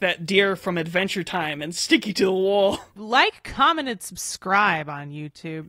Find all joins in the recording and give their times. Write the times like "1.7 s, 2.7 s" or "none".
3.0 s